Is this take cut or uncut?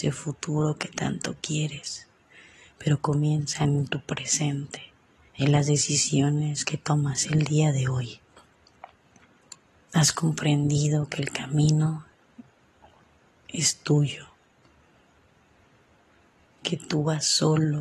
cut